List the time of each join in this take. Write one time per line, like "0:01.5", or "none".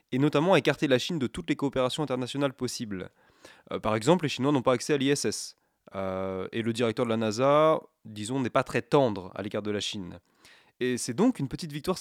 none

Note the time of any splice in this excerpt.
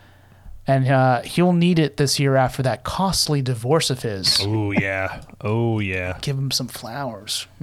none

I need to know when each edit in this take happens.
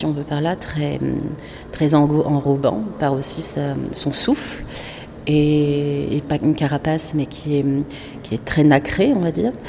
0:06.2

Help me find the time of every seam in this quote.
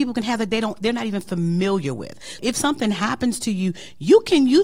0:02.4

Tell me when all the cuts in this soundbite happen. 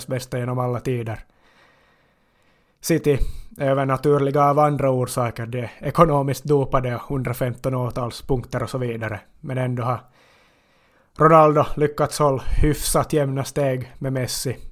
none

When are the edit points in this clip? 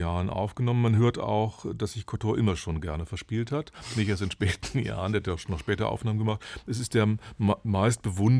none

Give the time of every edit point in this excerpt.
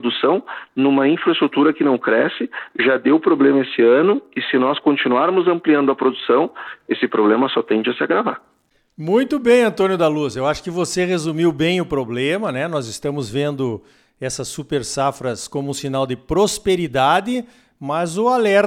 none

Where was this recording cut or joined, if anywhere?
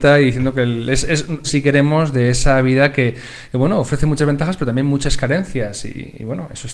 0:01.4

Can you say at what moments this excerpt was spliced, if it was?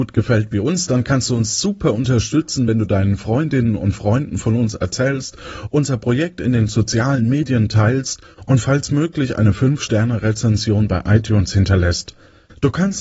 none

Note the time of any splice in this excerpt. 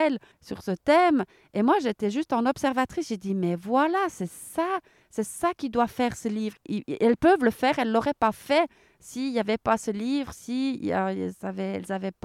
0:06.6

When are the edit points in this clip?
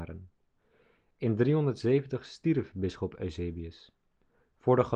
none

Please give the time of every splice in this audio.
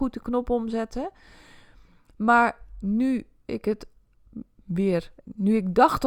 0:05.2

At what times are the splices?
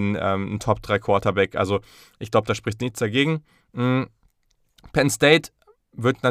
none

